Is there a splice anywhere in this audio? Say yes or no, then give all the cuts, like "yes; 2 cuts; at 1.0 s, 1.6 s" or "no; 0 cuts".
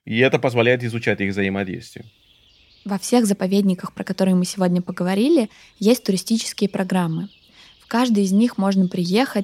no; 0 cuts